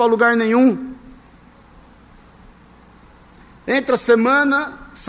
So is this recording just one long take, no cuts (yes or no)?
yes